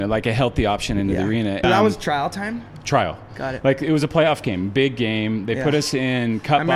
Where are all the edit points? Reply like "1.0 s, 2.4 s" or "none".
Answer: 1.6 s